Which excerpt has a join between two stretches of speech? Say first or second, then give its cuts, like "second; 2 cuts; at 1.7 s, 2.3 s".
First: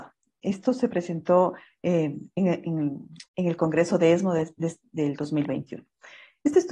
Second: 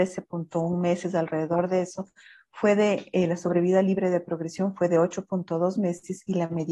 first; 1 cut; at 3.3 s